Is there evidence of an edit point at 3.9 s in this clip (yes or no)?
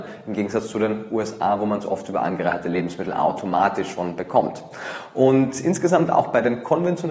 no